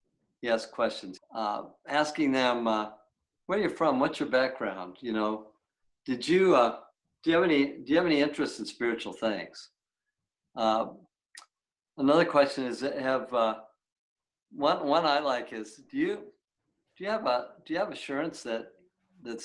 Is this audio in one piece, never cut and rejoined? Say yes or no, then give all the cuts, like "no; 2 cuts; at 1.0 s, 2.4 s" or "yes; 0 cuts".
no; 1 cut; at 1.2 s